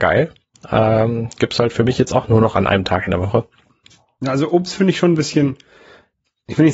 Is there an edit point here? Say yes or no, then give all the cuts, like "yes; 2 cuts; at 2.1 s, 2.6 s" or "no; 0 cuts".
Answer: no; 0 cuts